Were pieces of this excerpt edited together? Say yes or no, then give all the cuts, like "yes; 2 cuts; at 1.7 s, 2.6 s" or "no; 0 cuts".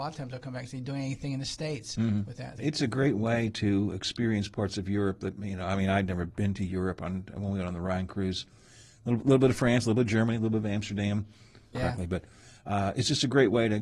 yes; 2 cuts; at 2.6 s, 11.7 s